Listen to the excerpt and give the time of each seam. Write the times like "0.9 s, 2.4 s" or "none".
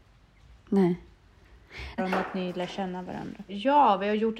2.0 s, 3.5 s